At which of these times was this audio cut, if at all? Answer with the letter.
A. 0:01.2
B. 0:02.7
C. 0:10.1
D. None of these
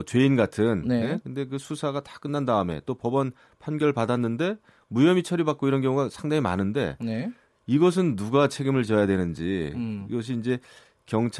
A